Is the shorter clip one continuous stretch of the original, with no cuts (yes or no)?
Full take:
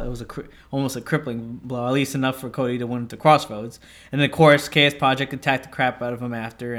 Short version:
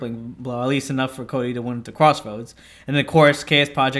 yes